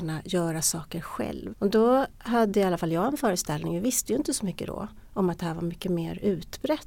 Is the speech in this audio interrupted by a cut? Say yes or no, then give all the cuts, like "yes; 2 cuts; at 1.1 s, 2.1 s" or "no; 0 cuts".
yes; 1 cut; at 1.5 s